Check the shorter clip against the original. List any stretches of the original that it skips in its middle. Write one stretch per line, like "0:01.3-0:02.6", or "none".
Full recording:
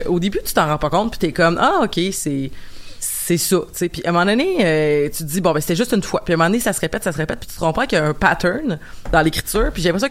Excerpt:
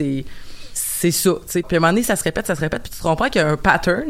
0:03.9-0:06.2